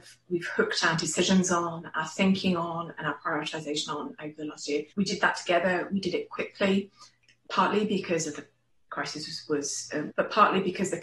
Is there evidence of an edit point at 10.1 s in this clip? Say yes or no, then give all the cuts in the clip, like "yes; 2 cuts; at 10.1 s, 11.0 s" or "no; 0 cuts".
yes; 2 cuts; at 4.9 s, 10.1 s